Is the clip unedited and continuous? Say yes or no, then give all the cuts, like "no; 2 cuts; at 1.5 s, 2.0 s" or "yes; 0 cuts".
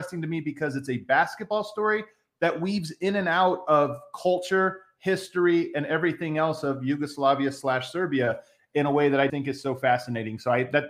no; 1 cut; at 9.3 s